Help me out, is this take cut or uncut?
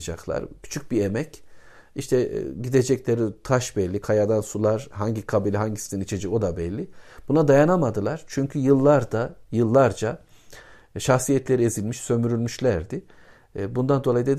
uncut